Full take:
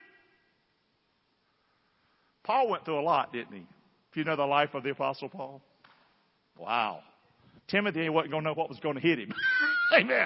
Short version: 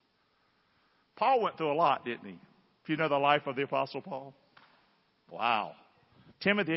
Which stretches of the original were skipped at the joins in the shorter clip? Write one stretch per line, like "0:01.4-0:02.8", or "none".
none